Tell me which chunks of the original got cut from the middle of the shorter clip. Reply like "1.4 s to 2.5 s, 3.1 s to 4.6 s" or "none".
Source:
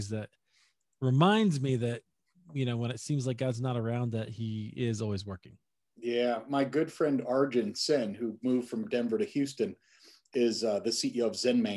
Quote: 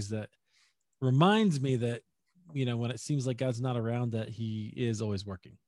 none